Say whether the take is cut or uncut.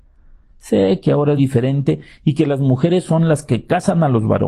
cut